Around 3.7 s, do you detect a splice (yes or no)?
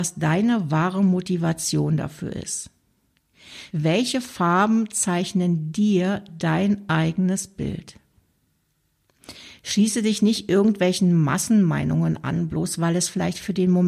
yes